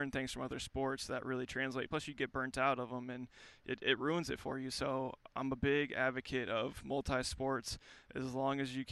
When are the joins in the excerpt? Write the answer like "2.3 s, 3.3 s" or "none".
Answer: none